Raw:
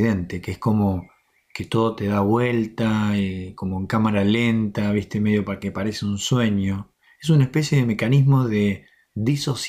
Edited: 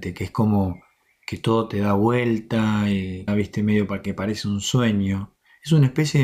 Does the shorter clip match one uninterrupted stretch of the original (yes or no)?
no